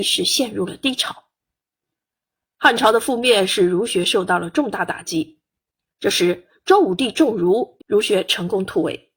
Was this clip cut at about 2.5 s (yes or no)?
no